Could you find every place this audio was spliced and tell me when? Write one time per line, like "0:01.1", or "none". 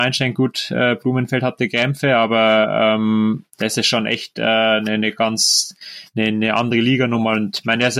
0:03.5